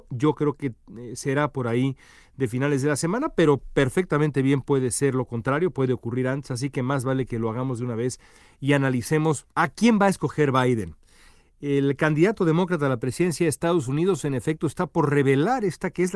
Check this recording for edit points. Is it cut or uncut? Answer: uncut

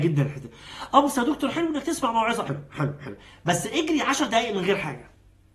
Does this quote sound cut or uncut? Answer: cut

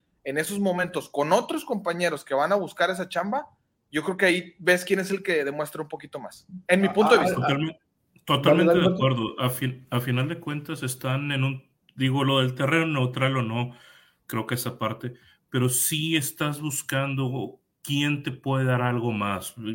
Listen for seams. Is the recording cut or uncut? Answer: uncut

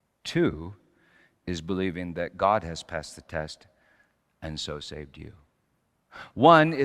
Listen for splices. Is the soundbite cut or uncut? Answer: uncut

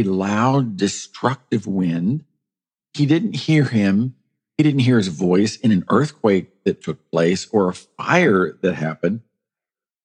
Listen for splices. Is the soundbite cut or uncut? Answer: uncut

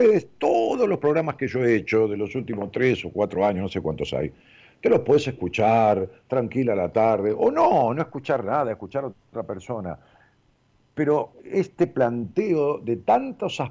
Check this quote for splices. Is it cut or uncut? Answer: cut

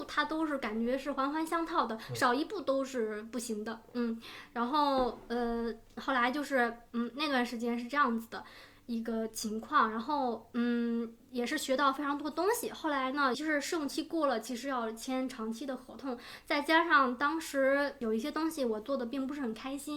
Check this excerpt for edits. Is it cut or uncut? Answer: cut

